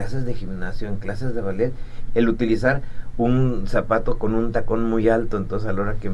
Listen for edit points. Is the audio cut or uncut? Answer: cut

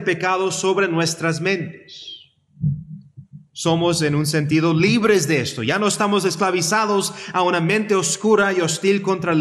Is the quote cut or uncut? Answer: uncut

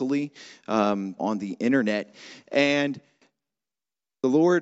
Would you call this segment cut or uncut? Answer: cut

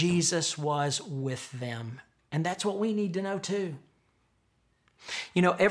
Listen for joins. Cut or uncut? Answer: uncut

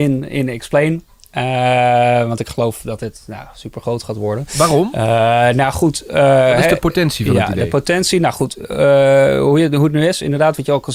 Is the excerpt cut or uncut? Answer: uncut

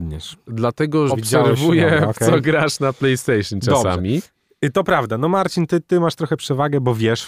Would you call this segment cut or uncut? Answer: cut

